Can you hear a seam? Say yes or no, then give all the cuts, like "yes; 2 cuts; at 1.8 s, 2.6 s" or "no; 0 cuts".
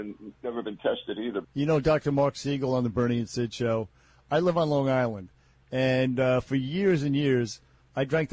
yes; 1 cut; at 1.4 s